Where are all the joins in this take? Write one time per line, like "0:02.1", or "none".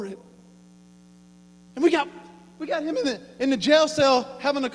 0:01.7